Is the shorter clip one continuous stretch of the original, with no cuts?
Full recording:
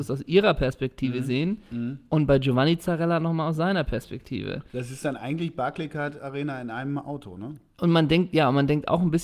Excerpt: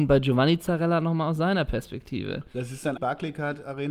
no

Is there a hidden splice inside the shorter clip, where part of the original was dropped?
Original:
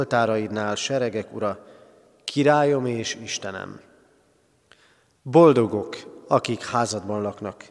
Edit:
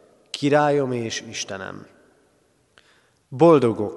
no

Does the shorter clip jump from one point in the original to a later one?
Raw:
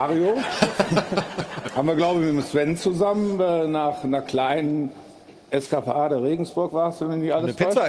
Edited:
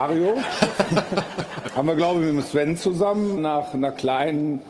yes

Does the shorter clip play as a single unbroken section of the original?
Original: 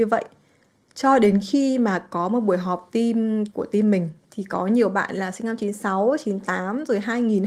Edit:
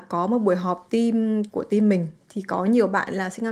yes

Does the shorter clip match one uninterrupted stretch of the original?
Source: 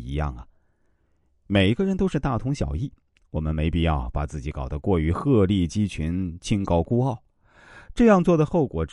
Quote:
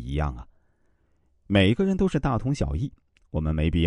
yes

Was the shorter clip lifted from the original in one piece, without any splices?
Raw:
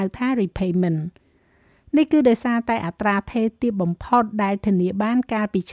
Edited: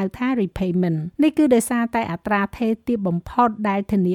no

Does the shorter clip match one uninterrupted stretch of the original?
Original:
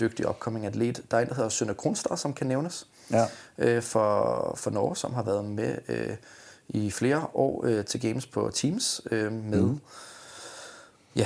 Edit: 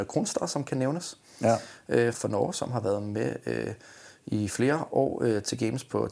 no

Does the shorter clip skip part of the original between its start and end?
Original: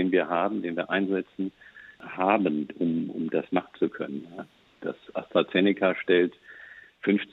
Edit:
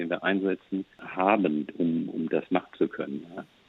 yes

